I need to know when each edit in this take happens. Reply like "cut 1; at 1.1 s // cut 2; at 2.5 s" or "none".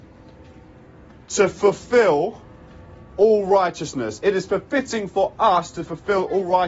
none